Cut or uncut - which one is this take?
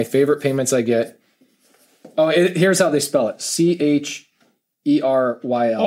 uncut